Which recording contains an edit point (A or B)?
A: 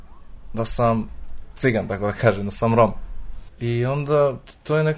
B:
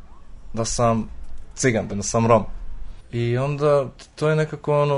B